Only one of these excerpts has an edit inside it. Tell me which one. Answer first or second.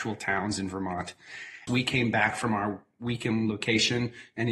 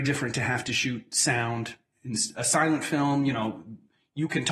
first